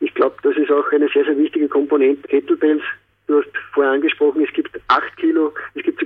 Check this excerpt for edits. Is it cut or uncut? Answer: cut